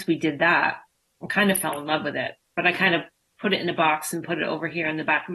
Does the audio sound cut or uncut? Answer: uncut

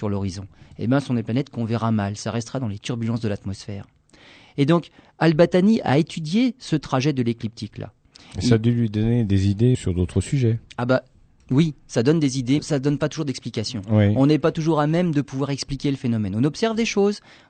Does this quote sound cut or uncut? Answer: cut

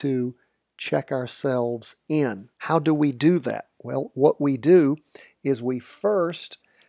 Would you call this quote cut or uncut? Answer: cut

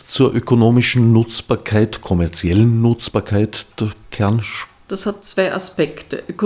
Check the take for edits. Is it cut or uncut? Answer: cut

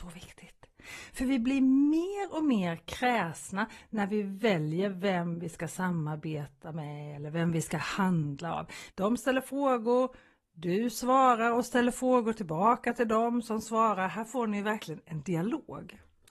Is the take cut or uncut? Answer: cut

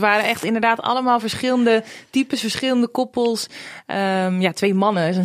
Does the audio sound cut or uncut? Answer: uncut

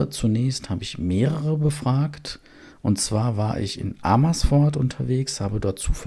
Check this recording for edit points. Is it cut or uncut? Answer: uncut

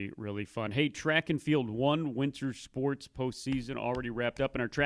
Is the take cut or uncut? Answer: uncut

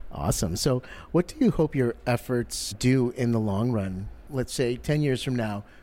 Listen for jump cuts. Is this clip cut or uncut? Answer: cut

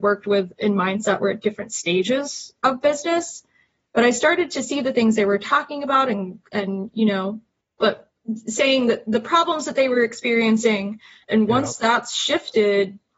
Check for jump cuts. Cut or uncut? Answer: cut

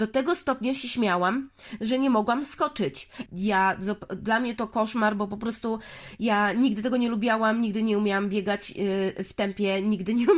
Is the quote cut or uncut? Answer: cut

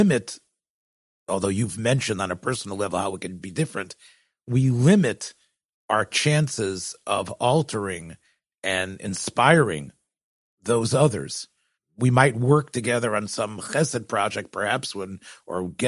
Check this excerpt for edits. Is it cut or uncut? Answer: uncut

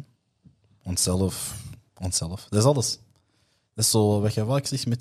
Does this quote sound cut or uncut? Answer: uncut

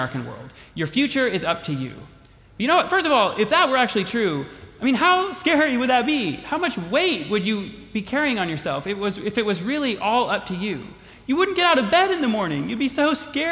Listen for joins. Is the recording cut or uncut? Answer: uncut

